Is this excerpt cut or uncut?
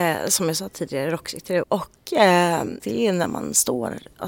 cut